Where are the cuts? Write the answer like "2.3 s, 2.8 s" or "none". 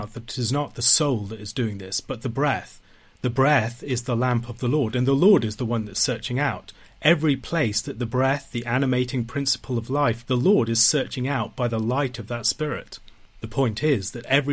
10.2 s

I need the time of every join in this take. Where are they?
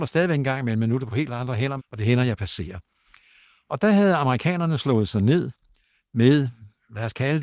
1.8 s

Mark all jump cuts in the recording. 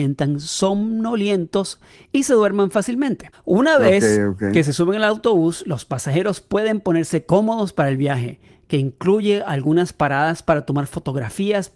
none

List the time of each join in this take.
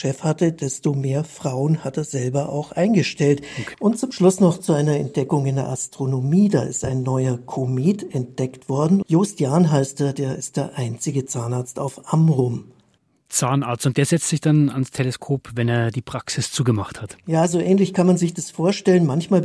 3.7 s, 9.0 s

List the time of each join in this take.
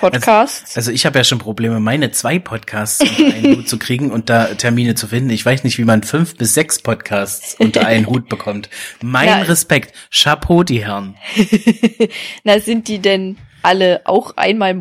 none

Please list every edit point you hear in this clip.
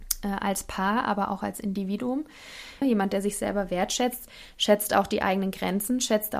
2.8 s

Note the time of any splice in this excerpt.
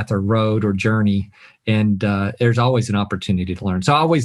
none

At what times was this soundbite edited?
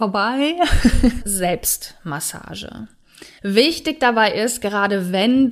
1.2 s, 3.4 s

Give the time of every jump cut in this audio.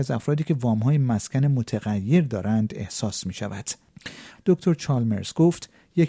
4.3 s

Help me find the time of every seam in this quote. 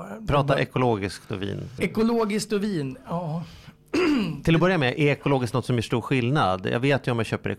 1.8 s

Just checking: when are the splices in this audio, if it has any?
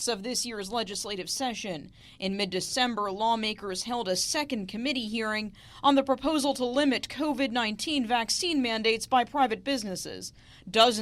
none

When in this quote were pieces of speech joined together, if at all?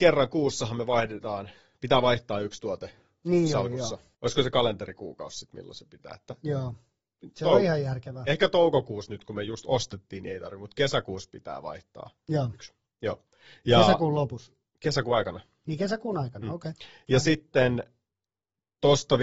4.1 s

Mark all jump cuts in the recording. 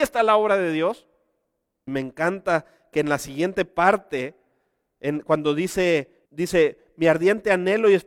1.9 s, 6.3 s

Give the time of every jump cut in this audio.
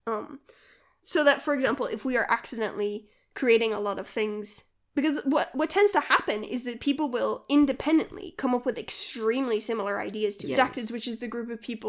10.6 s

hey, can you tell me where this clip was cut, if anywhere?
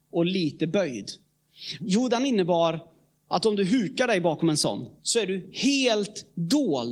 1.8 s, 5.0 s

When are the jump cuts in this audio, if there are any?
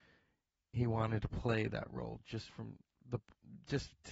none

